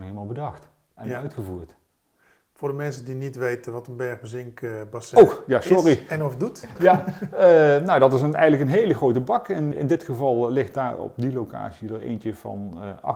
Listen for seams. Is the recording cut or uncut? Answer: cut